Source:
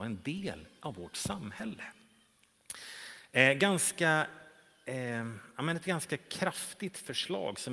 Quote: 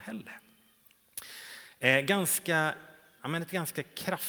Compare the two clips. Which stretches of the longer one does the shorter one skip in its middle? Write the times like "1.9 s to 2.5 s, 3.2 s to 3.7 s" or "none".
4.7 s to 5.5 s

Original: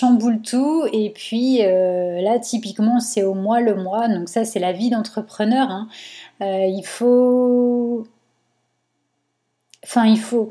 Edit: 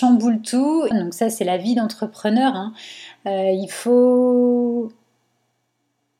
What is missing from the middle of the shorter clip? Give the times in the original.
0.9 s to 4.1 s

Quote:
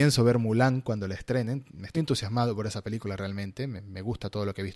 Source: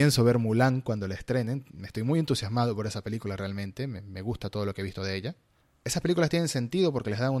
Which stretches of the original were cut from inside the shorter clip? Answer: 1.9 s to 2.1 s

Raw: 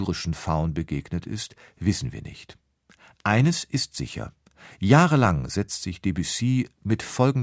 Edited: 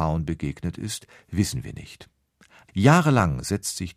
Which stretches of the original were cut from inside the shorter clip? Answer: 3.2 s to 4.7 s

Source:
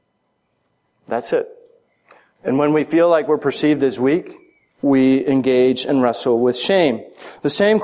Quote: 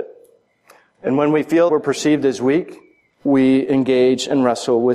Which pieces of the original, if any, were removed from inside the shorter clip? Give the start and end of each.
3.1 s to 3.3 s

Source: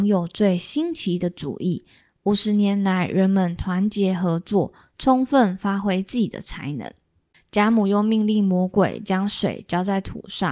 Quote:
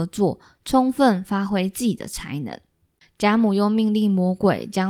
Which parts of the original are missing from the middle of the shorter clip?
none

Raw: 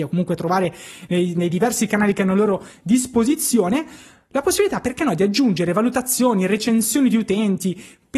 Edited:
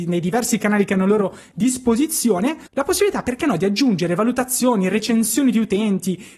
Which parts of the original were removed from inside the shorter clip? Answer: 4.0 s to 4.2 s

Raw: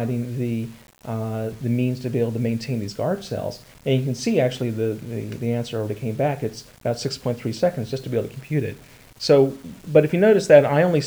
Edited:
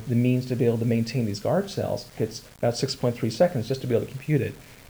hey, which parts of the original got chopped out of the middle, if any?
3.7 s to 6.4 s

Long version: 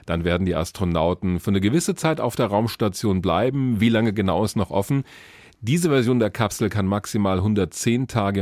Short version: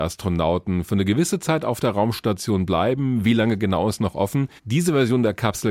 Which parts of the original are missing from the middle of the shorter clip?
5.1 s to 5.5 s

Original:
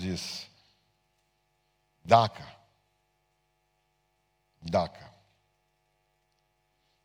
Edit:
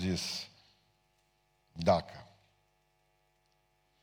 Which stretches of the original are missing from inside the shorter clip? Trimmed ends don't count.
1.6 s to 4.5 s

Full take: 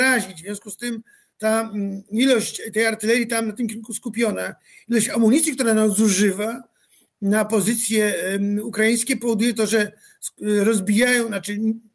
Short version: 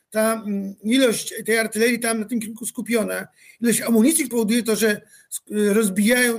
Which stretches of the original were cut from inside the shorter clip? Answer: 5.6 s to 9.2 s

